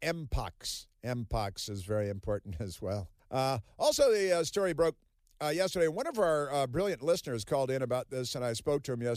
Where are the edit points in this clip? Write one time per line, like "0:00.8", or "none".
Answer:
0:03.2

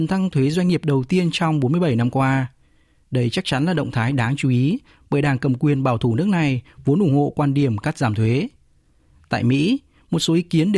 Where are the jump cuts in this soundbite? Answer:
none

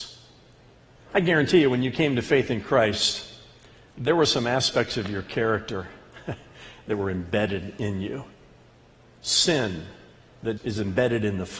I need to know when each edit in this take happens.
0:10.6

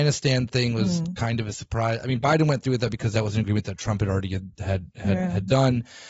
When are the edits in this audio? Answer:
none

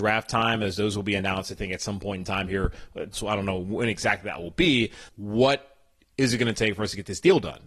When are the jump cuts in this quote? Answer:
0:03.1
0:05.1

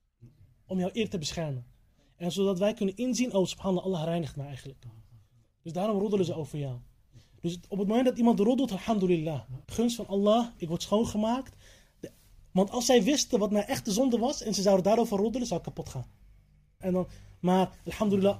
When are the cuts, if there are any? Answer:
0:09.6
0:16.8

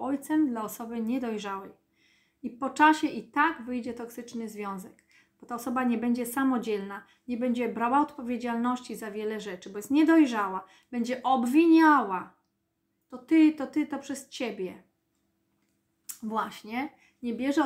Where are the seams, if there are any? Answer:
none

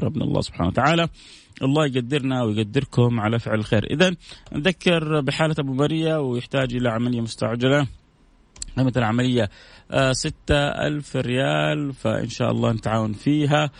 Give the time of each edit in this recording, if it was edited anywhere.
none

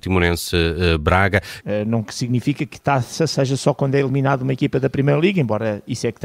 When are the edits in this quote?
0:01.6

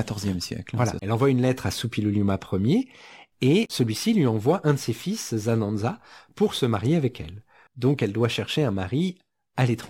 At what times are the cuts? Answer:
0:01.0
0:07.7

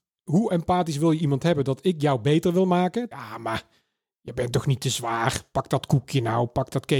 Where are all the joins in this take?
0:03.1

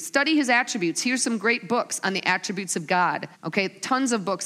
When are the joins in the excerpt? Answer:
0:03.3

